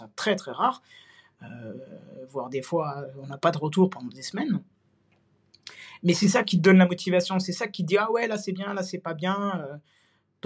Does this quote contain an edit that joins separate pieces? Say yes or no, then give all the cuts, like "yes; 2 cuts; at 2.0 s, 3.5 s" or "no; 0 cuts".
no; 0 cuts